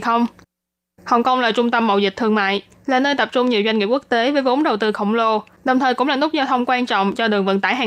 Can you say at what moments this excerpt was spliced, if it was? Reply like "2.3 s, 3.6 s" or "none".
none